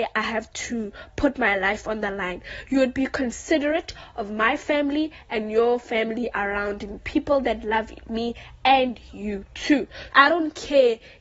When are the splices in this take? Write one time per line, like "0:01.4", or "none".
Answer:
0:10.1